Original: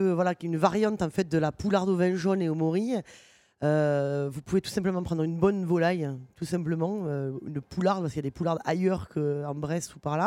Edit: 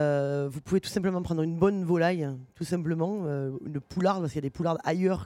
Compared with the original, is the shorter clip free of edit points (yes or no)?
yes